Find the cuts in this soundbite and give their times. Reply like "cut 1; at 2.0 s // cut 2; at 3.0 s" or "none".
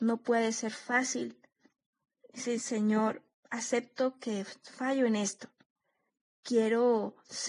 cut 1; at 2.2 s // cut 2; at 6.3 s